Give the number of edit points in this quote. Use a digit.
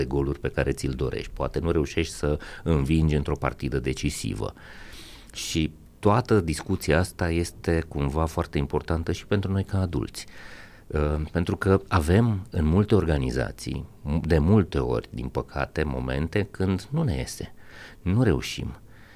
0